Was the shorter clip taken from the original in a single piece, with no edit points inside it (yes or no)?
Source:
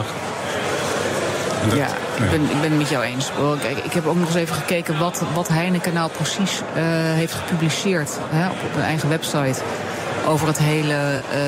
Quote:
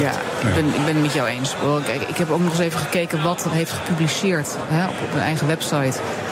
no